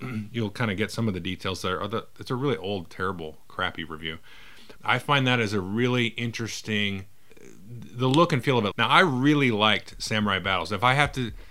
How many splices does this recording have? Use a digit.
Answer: 2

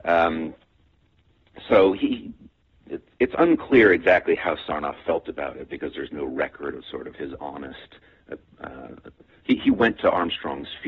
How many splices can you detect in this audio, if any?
0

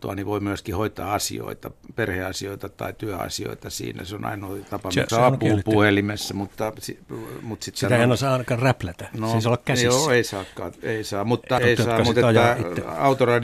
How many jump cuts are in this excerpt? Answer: 2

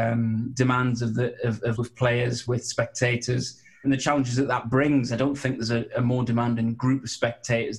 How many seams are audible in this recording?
3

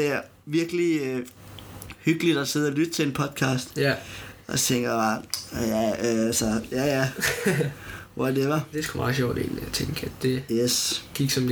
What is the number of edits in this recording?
1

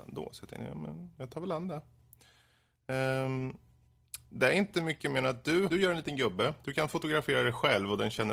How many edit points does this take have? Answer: 1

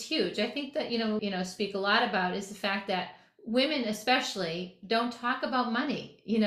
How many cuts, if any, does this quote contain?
1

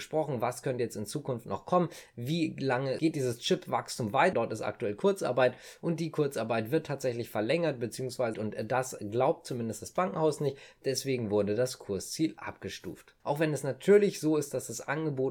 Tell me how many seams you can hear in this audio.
3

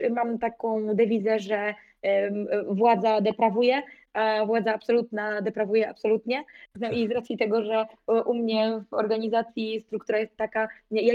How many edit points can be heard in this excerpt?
0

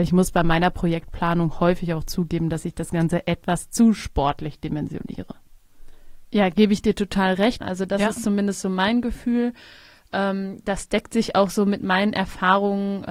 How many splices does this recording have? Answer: 1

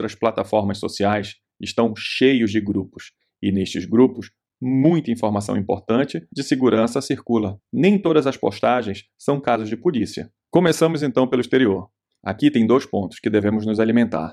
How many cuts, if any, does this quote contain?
2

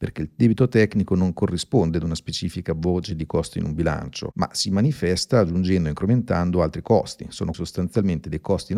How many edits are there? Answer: 1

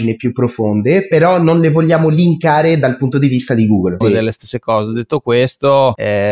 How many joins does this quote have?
1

